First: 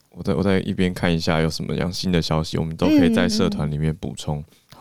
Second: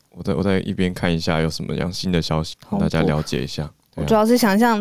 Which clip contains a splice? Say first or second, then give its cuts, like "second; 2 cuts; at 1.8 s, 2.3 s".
second; 1 cut; at 2.5 s